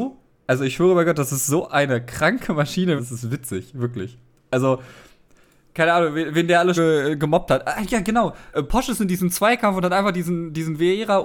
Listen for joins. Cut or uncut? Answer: cut